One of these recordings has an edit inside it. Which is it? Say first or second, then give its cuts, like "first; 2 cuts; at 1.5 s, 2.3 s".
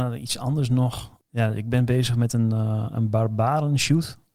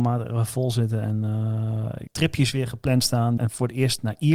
second; 2 cuts; at 2.1 s, 3.4 s